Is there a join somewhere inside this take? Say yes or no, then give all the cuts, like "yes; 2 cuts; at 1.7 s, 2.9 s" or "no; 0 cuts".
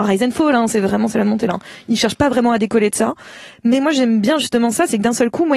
yes; 1 cut; at 1.5 s